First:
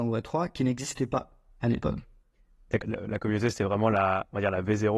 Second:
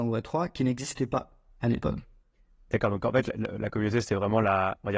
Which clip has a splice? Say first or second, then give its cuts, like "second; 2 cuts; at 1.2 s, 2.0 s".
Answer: first; 1 cut; at 2.8 s